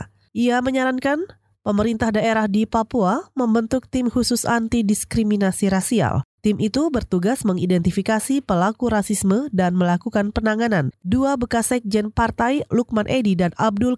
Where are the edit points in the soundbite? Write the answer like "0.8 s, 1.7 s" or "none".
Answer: 11.0 s